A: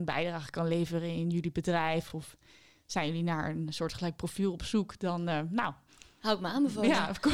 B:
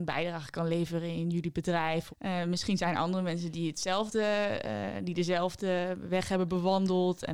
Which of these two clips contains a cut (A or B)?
B